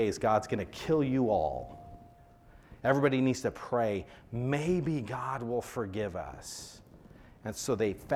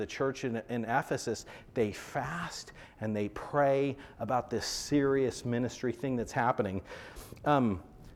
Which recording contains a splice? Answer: first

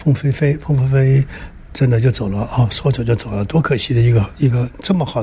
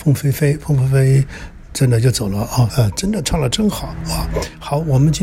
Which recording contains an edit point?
second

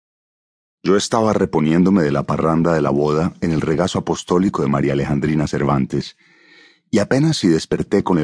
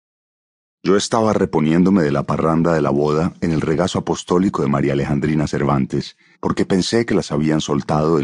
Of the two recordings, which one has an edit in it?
second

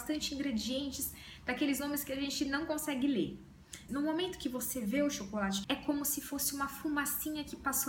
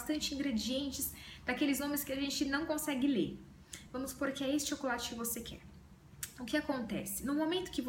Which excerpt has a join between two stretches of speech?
first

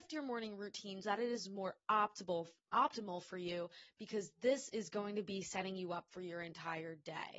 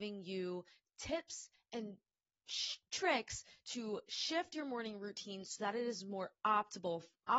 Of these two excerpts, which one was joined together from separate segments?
first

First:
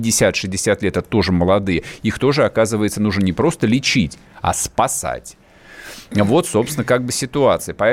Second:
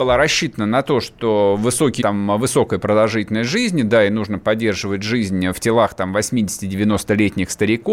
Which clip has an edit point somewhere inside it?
second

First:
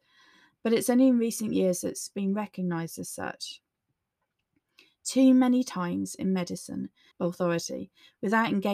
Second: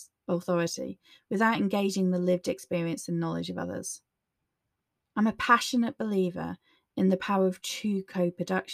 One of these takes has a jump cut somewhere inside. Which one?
first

